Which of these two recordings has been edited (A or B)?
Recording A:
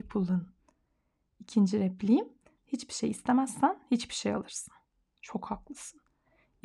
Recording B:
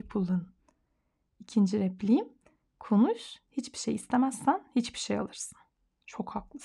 A